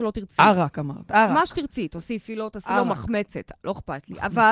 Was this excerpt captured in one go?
yes; 0 cuts

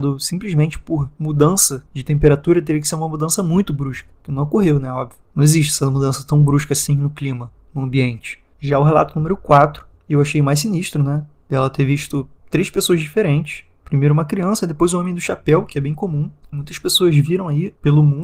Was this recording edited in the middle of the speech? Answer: no; 0 cuts

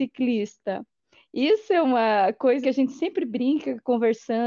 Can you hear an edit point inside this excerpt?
yes; 1 cut; at 2.6 s

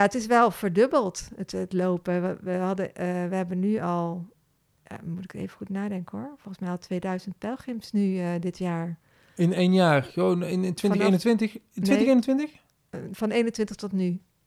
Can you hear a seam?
no; 0 cuts

